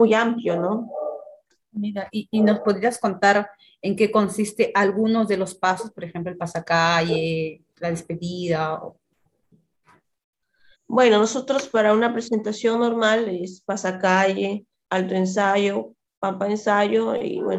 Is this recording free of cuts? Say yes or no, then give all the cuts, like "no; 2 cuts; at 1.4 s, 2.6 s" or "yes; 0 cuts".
no; 2 cuts; at 10.7 s, 14.9 s